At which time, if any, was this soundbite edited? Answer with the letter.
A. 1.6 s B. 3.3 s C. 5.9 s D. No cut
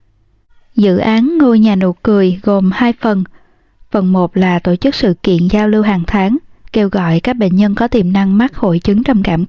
D